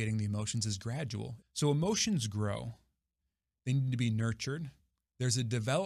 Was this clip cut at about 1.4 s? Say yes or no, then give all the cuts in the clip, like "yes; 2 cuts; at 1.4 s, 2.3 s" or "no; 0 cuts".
yes; 1 cut; at 1.4 s